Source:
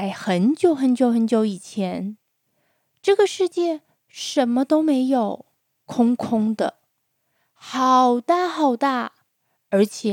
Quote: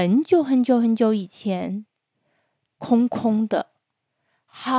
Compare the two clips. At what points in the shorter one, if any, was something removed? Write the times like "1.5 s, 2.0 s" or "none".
2.6 s